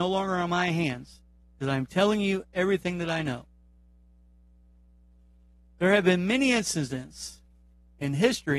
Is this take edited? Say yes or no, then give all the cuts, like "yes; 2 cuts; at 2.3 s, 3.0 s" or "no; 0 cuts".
no; 0 cuts